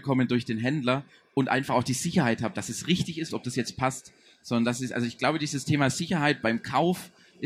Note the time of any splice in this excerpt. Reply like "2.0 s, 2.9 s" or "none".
3.3 s